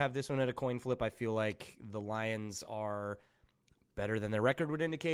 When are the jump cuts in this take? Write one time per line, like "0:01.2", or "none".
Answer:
none